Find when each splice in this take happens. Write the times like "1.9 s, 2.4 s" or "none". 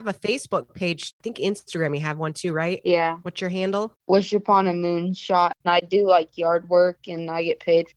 5.6 s